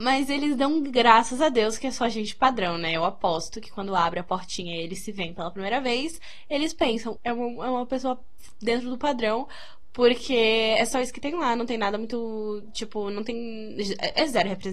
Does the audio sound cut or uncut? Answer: cut